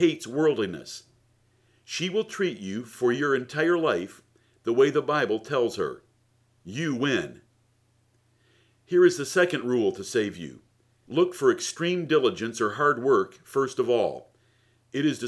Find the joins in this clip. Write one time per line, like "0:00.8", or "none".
0:11.0